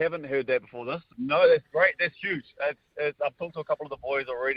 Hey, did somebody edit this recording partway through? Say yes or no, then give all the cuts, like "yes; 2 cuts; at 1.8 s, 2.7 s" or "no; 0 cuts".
yes; 1 cut; at 1.1 s